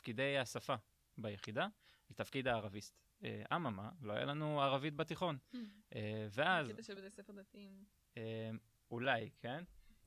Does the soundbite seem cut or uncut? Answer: uncut